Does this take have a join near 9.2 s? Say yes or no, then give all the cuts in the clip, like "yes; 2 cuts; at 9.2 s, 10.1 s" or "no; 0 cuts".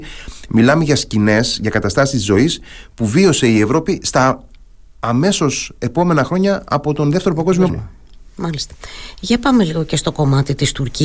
no; 1 cut; at 7.7 s